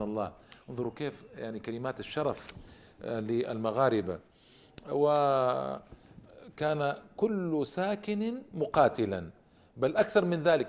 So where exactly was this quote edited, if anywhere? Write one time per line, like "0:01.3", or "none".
none